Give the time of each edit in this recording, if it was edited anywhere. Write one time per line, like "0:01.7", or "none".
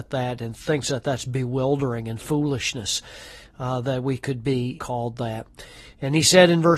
0:04.8